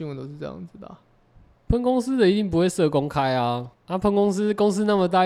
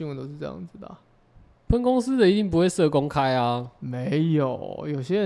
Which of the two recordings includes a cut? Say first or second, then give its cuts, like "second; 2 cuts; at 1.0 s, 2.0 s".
first; 1 cut; at 3.7 s